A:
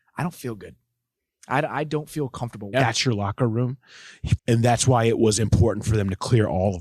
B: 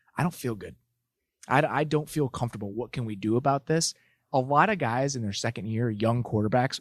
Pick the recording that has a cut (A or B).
A